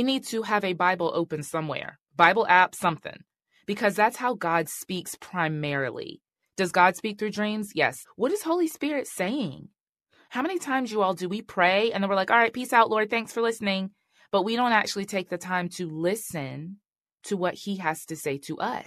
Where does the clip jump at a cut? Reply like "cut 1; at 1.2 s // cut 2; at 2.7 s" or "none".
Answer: cut 1; at 8.0 s